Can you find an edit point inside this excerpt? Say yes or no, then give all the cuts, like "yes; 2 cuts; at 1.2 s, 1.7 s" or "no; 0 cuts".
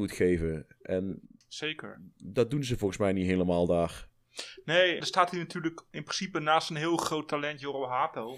yes; 2 cuts; at 2.1 s, 5.0 s